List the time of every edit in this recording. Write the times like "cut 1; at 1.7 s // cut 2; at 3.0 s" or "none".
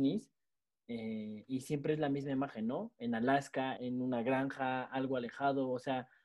cut 1; at 3.8 s